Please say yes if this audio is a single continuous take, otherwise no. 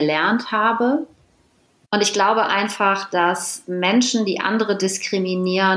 no